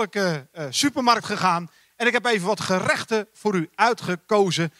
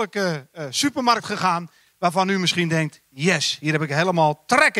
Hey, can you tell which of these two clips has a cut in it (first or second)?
second